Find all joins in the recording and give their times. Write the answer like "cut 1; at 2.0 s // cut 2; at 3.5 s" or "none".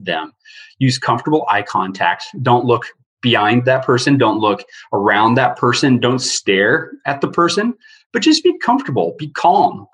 none